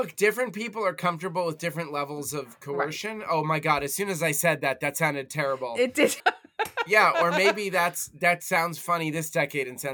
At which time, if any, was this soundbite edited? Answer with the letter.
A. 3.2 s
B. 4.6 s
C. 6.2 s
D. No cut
C